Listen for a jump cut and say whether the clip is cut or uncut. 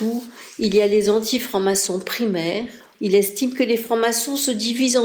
cut